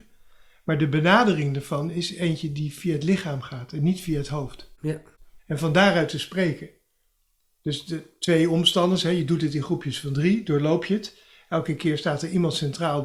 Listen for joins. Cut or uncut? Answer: cut